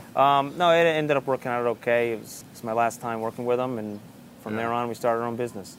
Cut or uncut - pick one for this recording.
cut